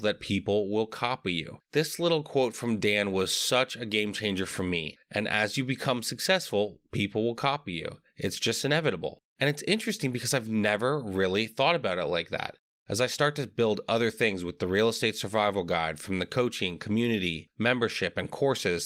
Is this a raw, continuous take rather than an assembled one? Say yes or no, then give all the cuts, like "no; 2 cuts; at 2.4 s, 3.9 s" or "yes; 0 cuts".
yes; 0 cuts